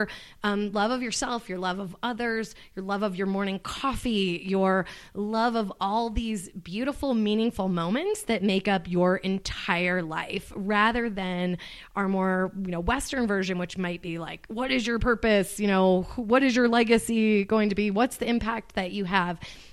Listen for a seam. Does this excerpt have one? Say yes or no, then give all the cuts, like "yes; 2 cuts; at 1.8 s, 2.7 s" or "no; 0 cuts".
no; 0 cuts